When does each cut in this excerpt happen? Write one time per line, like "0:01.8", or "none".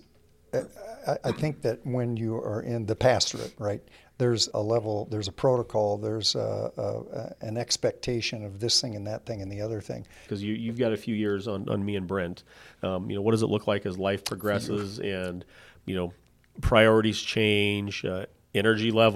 0:04.5
0:10.3